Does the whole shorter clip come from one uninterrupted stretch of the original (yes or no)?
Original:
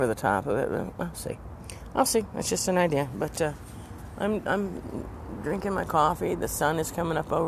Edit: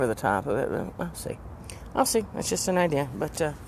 yes